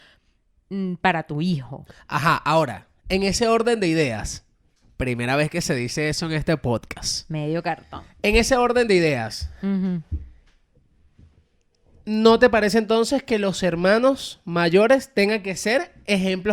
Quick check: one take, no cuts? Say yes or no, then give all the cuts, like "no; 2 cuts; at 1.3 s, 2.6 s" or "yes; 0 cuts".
yes; 0 cuts